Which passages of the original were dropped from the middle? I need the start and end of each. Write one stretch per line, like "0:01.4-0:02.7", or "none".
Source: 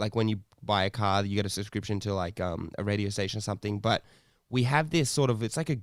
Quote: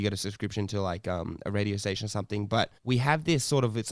0:04.1-0:04.4